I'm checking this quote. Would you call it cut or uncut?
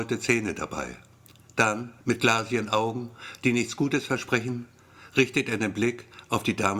cut